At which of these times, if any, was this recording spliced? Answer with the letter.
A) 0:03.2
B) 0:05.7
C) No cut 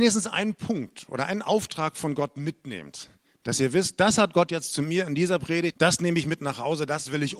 B